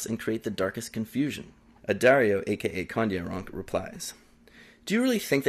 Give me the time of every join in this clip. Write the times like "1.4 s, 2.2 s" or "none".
none